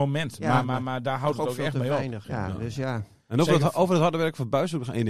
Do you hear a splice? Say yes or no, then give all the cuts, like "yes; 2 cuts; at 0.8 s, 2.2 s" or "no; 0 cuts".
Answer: yes; 1 cut; at 2.2 s